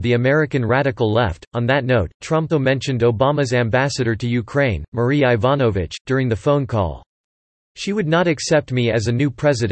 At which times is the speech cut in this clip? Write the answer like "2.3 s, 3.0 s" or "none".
2.5 s